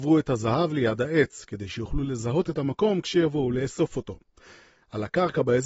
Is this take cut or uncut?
uncut